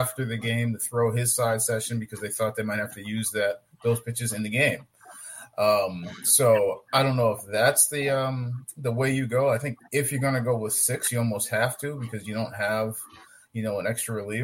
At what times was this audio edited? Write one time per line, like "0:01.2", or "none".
0:09.8